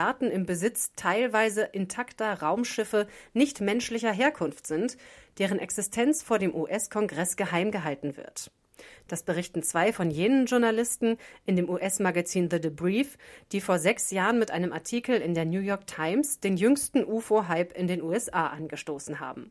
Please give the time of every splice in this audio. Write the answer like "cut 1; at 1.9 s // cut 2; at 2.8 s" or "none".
none